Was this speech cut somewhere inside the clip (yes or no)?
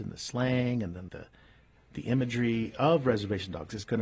yes